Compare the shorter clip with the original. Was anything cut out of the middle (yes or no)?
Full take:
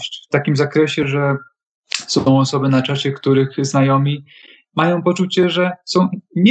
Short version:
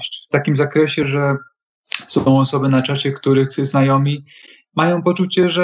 no